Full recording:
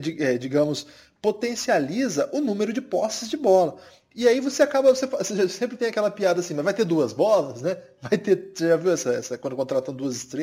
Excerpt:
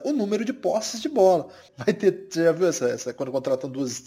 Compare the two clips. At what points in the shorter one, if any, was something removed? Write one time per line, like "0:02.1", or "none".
0:01.7